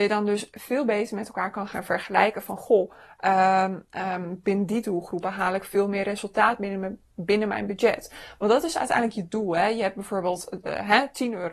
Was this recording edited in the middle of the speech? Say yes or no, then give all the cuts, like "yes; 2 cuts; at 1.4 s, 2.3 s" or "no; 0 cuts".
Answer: no; 0 cuts